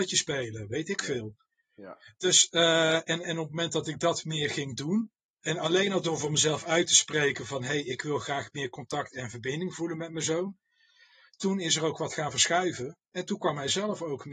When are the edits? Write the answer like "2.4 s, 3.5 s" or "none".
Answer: none